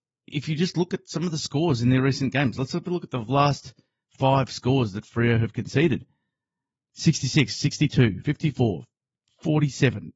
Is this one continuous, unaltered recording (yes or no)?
no